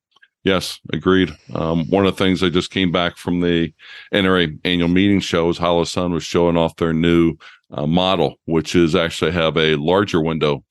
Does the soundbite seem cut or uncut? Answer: uncut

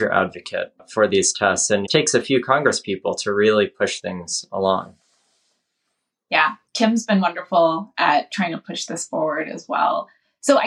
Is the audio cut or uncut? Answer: cut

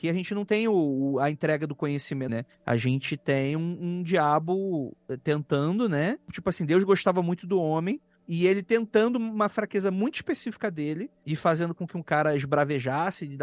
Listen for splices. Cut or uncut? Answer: cut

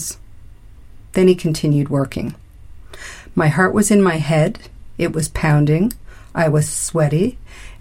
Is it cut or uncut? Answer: uncut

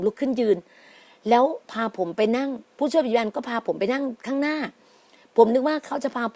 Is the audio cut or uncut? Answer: cut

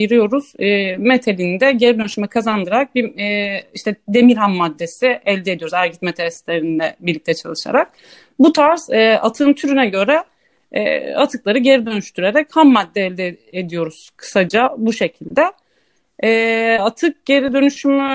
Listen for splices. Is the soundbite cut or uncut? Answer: uncut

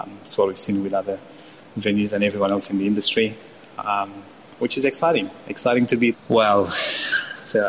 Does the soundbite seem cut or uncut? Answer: cut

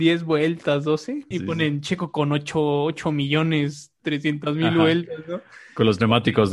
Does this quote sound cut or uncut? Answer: cut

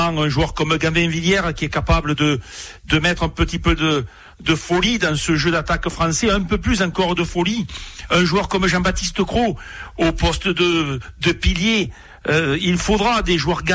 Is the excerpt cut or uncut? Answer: uncut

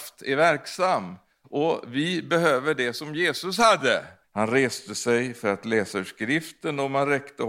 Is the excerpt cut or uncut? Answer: cut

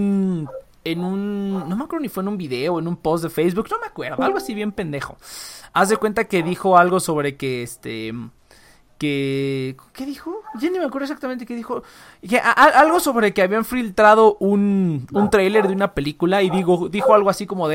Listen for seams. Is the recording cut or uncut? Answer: uncut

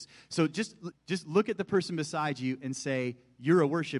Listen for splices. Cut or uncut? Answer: cut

